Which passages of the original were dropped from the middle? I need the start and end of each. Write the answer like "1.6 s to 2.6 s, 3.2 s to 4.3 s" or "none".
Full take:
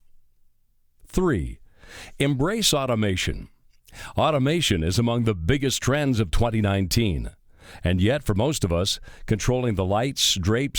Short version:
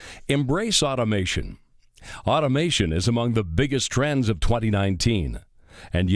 none